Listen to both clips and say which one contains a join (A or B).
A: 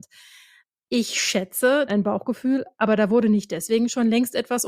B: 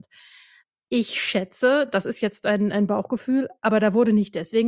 A